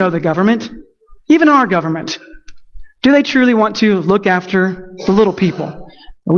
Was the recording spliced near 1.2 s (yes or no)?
no